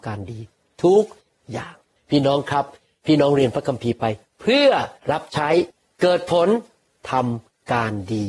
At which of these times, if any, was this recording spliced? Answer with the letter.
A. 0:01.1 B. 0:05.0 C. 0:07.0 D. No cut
B